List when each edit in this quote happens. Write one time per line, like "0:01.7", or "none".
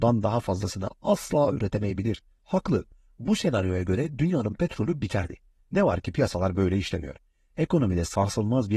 0:02.4